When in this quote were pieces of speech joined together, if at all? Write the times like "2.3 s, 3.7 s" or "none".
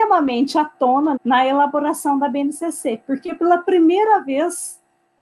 1.2 s